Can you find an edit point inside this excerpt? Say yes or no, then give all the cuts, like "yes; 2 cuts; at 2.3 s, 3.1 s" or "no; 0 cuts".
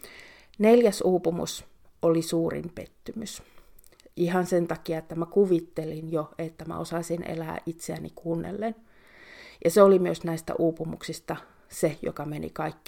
no; 0 cuts